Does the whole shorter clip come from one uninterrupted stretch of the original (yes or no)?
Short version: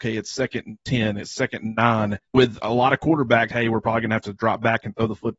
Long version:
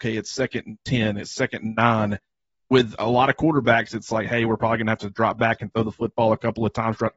no